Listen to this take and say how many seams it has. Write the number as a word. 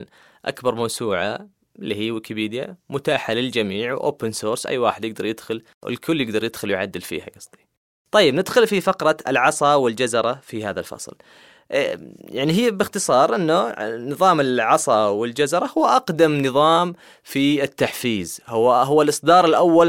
zero